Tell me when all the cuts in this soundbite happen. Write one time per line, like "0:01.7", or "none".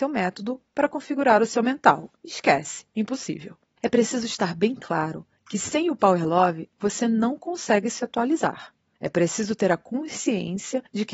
0:02.2